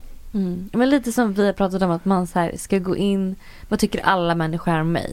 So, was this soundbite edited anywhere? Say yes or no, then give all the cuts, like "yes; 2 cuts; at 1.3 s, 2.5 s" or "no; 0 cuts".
yes; 1 cut; at 3.7 s